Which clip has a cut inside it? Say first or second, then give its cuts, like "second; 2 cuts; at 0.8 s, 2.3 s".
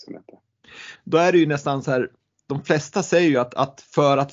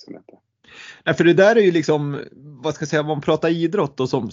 first; 1 cut; at 1.0 s